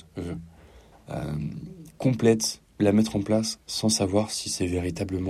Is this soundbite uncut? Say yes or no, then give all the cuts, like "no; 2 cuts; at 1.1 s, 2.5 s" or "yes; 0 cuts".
no; 2 cuts; at 0.9 s, 2.7 s